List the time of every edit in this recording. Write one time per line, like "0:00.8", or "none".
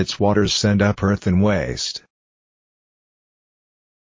none